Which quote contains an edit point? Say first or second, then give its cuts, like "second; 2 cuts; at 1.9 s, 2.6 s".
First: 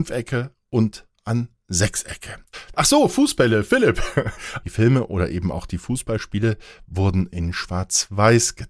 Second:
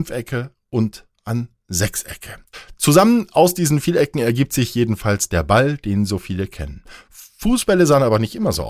first; 2 cuts; at 2.7 s, 4.6 s